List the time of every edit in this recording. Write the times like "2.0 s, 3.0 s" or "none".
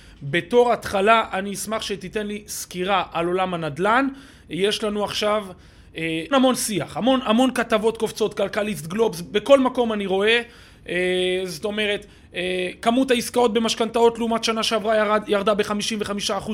6.3 s